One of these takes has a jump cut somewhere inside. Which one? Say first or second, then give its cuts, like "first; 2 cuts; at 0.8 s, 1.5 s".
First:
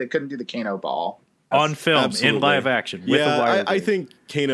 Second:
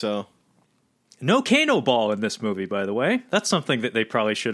first; 1 cut; at 1.5 s